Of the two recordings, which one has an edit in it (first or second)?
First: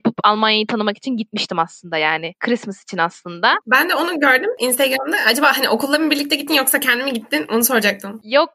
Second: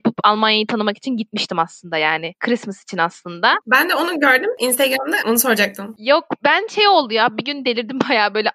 second